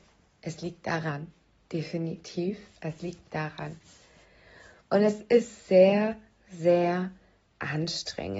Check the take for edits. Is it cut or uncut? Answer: uncut